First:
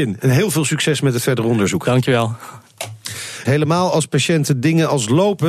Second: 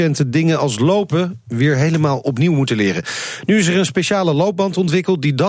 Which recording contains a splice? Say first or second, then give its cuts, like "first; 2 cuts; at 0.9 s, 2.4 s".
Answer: first; 1 cut; at 3.4 s